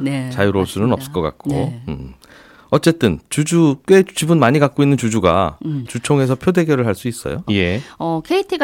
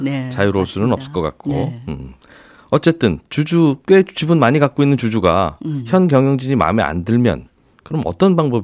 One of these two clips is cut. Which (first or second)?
first